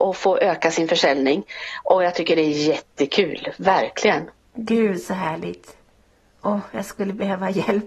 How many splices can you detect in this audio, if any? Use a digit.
0